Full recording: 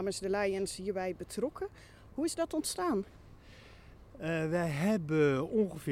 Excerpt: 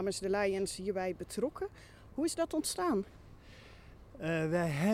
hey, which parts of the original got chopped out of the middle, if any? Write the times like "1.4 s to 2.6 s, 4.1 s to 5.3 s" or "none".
none